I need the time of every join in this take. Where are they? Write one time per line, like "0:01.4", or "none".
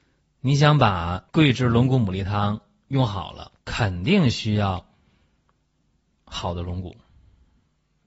0:01.3
0:03.6

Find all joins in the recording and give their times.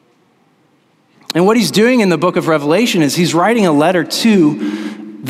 0:01.1

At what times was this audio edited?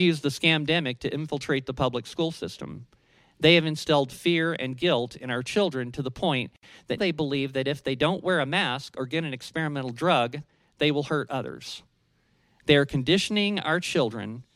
0:07.0

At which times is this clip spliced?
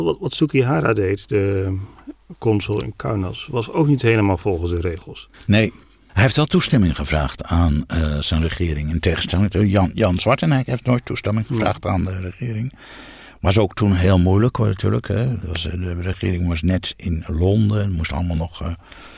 none

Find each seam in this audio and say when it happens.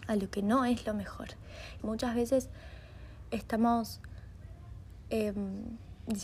0:01.8

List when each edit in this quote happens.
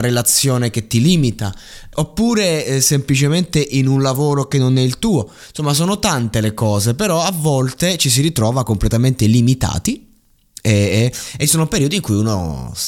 0:01.9

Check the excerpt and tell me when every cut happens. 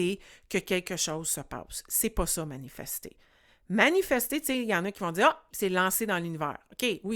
0:05.5

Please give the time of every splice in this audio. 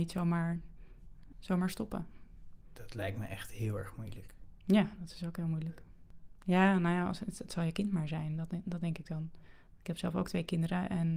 0:01.3

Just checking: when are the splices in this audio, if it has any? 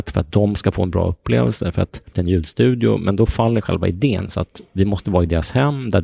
0:02.1
0:04.3

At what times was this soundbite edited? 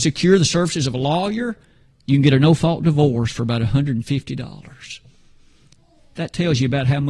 none

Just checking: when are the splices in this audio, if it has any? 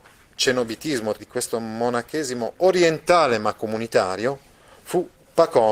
0:01.2

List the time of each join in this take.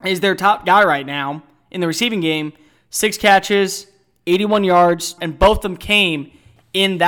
0:05.2

